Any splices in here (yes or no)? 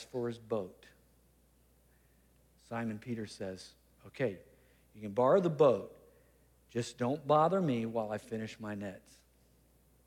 no